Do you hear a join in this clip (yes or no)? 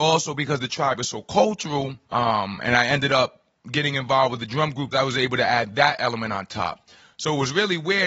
yes